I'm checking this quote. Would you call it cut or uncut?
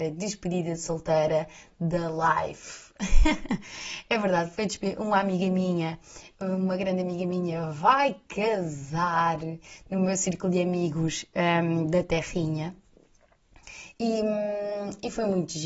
cut